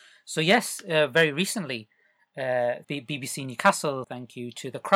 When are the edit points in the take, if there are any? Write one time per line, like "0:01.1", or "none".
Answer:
0:02.8
0:04.0